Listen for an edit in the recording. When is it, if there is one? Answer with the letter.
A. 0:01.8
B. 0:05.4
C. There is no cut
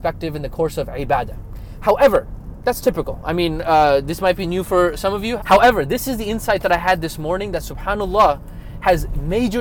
B